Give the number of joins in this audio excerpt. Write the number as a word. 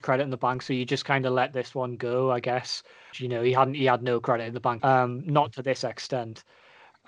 two